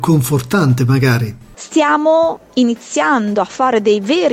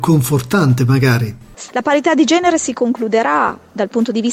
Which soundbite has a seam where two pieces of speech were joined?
second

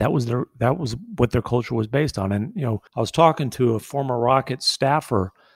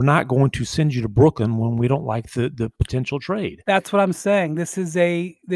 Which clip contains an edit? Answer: first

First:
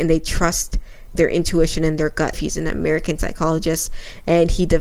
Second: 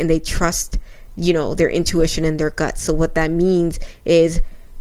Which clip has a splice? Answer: first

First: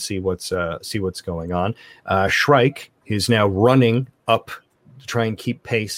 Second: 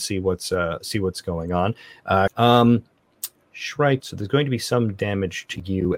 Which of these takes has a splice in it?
second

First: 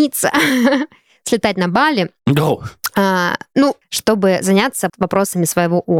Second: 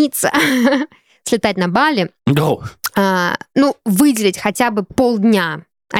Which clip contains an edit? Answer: first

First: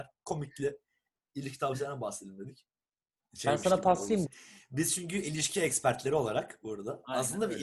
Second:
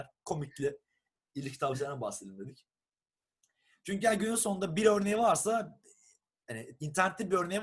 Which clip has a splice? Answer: first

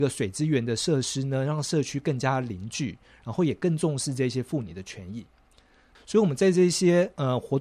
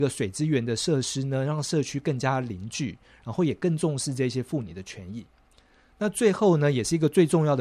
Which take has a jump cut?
first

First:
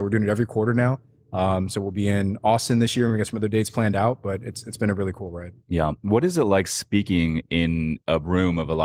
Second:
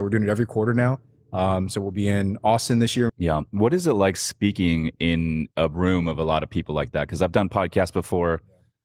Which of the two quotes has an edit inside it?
second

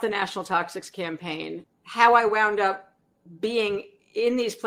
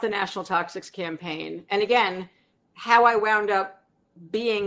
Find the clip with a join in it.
first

